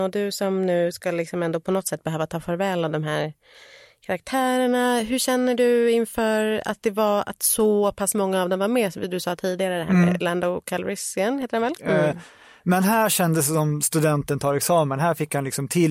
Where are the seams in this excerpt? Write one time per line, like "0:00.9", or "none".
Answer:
0:11.8